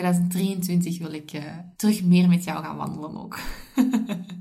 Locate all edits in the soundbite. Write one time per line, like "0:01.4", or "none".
0:01.7